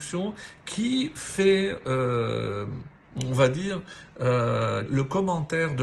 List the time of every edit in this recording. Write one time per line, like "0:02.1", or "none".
0:04.9